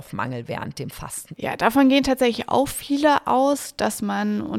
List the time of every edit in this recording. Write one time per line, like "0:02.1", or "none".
0:01.3